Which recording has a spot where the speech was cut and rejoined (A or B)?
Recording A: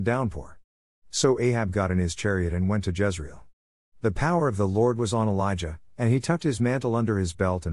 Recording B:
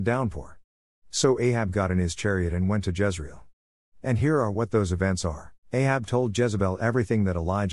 B